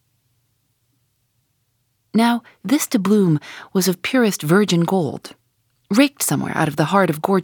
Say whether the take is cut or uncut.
uncut